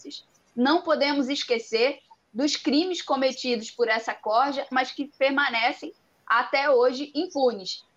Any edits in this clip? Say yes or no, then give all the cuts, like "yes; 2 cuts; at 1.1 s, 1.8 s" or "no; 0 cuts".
yes; 1 cut; at 4.7 s